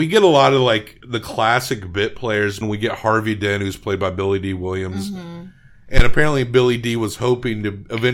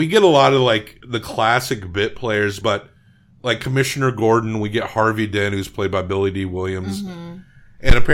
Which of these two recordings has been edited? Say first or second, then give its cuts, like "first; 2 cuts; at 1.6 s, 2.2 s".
first; 1 cut; at 2.6 s